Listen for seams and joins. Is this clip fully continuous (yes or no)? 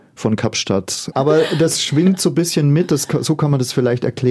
no